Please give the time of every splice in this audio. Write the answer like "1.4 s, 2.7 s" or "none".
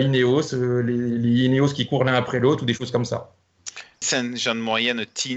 4.0 s